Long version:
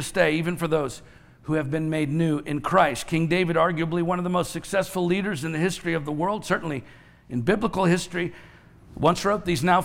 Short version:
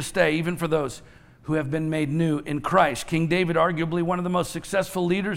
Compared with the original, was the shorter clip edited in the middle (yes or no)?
no